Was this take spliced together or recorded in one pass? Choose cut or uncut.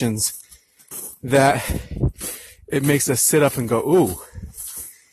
uncut